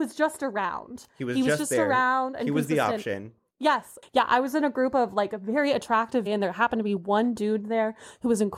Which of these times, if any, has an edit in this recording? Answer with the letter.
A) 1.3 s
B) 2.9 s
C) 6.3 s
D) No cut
C